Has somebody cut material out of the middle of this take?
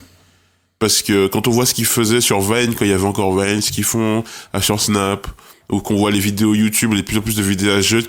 no; 0 cuts

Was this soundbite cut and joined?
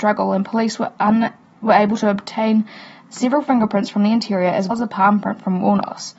yes; 1 cut; at 4.7 s

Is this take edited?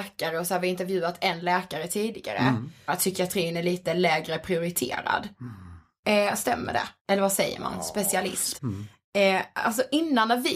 yes; 3 cuts; at 2.9 s, 7.0 s, 8.6 s

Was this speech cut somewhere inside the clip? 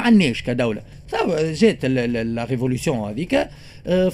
no; 0 cuts

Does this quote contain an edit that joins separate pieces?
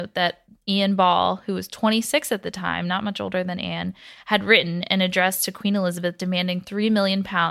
no; 0 cuts

